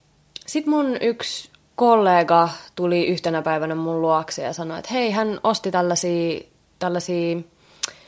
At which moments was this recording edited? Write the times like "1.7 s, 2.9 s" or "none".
none

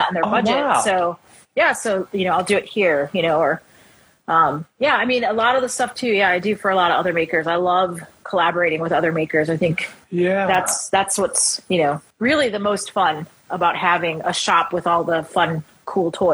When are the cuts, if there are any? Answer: 12.1 s

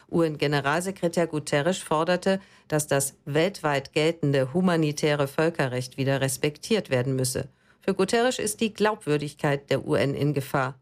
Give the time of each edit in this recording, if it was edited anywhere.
none

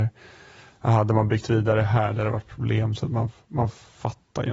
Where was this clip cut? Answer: none

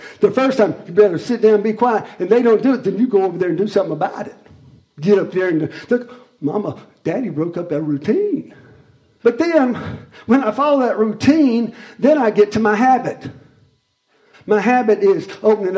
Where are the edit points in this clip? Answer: 9.2 s, 14.3 s

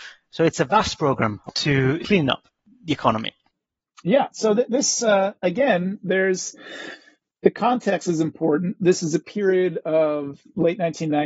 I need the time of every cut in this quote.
none

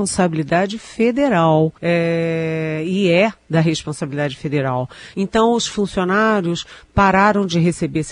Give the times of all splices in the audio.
1.8 s, 5.1 s

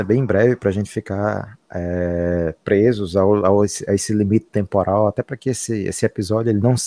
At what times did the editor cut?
none

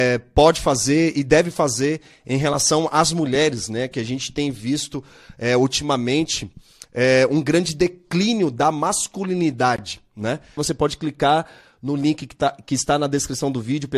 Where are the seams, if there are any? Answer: 10.6 s

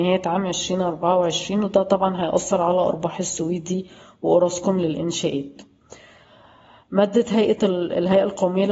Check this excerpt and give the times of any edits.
none

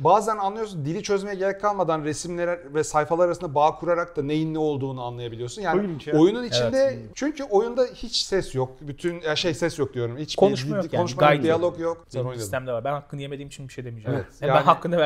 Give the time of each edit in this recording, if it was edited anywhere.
7.1 s, 12.0 s

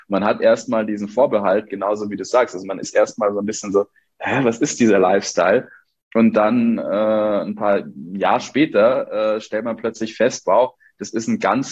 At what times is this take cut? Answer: none

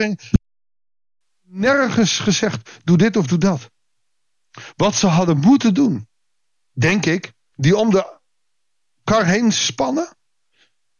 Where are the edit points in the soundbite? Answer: 7.5 s

